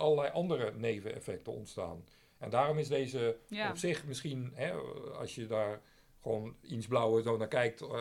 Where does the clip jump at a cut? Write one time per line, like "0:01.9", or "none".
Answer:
none